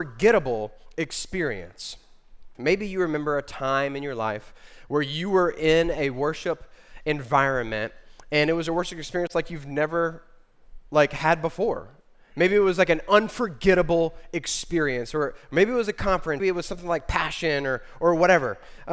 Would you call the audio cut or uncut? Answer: cut